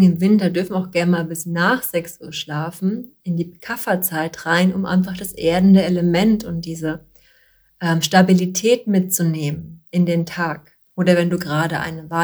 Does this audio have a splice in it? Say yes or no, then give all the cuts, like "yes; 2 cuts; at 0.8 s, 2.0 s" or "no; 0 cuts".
yes; 1 cut; at 10.8 s